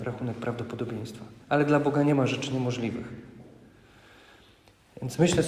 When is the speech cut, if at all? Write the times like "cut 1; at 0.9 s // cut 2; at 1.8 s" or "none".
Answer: cut 1; at 1.4 s